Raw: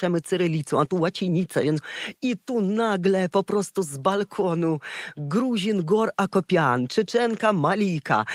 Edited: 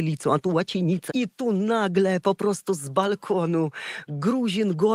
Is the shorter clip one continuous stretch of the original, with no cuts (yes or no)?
no